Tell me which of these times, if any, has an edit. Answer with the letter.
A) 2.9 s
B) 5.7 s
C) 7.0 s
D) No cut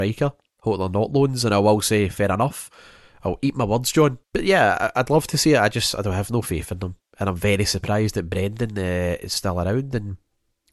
D